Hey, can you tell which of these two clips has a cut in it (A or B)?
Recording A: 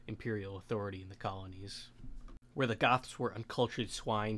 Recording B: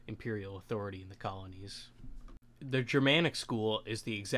A